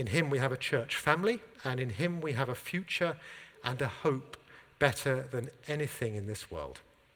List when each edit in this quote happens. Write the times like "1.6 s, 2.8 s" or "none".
1.5 s